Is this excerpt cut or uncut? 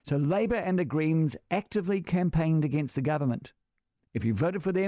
uncut